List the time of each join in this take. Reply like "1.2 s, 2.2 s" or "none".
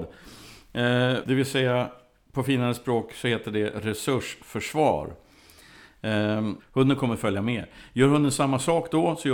1.2 s, 6.6 s